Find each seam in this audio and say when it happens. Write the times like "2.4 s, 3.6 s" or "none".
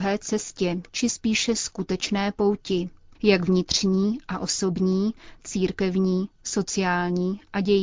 5.4 s